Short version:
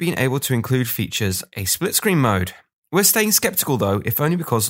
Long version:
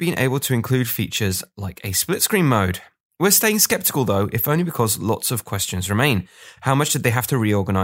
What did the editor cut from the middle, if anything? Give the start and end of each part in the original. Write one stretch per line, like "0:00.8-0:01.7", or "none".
0:01.5-0:01.8